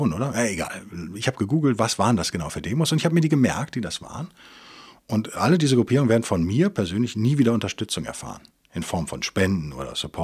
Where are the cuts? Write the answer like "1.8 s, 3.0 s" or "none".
none